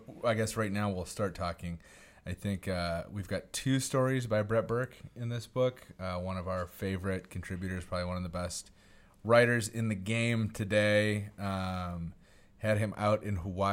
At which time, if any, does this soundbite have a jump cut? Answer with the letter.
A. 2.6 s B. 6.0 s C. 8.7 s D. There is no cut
D